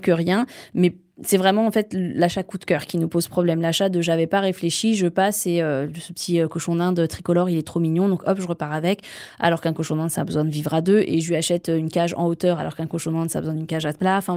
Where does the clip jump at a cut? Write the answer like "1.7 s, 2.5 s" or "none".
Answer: none